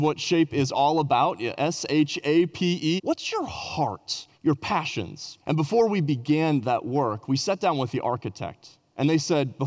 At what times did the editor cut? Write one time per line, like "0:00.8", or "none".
0:03.0
0:04.3
0:05.4